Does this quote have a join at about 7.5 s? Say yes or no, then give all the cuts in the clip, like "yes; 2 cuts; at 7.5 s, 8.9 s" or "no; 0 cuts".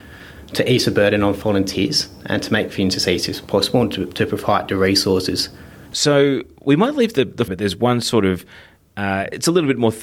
yes; 2 cuts; at 5.9 s, 7.5 s